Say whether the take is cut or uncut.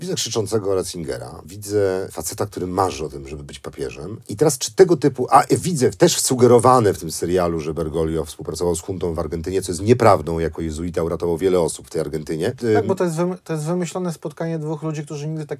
cut